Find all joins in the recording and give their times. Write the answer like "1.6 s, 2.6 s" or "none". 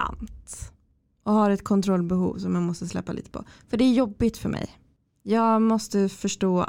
none